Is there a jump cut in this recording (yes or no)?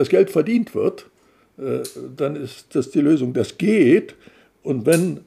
no